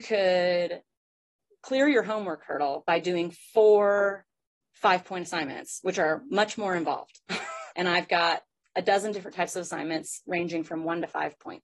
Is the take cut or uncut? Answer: cut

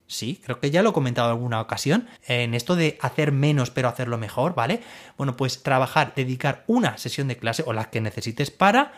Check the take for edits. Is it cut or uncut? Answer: cut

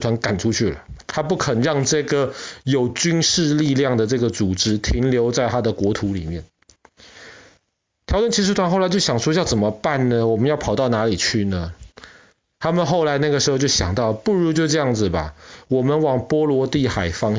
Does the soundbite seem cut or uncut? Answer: uncut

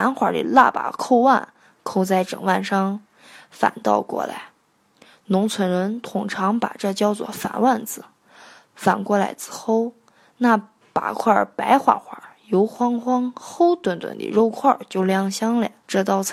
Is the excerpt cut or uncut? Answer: uncut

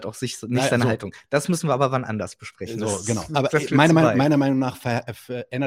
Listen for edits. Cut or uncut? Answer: uncut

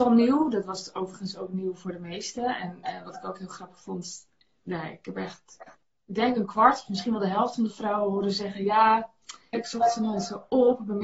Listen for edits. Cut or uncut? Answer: cut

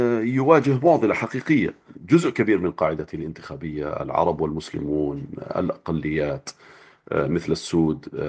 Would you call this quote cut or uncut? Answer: uncut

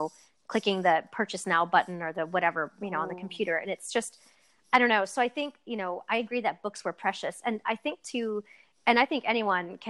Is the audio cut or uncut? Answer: uncut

